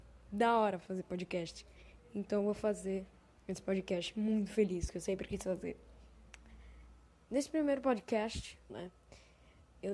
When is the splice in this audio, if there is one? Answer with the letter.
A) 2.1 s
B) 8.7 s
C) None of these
B